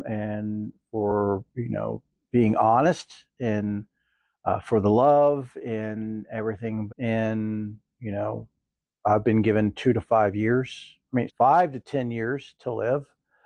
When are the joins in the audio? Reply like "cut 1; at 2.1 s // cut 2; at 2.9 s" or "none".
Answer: cut 1; at 6.9 s // cut 2; at 11.3 s